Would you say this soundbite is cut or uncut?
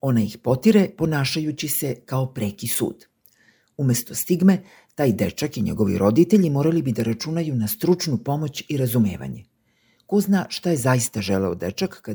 uncut